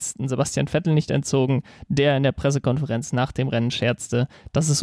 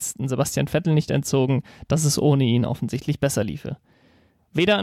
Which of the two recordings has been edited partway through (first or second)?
second